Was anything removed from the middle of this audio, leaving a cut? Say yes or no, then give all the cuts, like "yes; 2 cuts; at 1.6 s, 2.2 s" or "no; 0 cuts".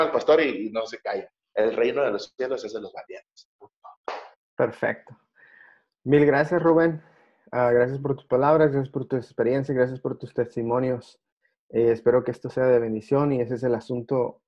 no; 0 cuts